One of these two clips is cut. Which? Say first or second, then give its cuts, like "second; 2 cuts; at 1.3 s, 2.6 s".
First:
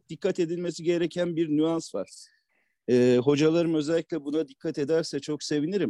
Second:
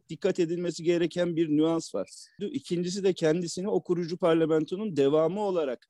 second; 1 cut; at 2.4 s